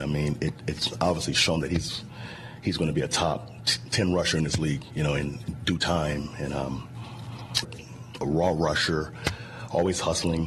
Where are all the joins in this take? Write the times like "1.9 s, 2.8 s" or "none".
7.6 s